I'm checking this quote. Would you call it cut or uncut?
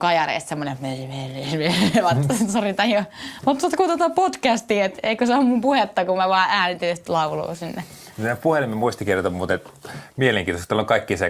uncut